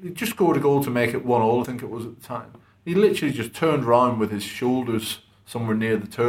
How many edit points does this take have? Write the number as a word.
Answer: zero